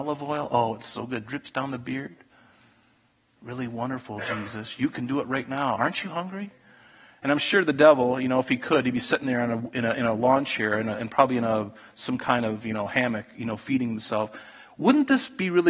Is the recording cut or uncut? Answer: uncut